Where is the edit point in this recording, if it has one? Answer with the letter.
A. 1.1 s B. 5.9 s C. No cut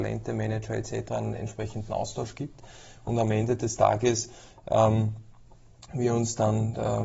C